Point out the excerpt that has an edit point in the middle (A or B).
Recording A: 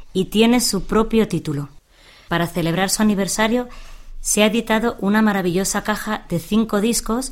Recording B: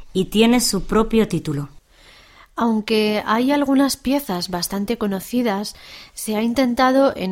A